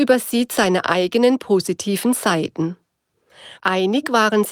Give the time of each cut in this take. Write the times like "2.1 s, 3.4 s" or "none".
3.6 s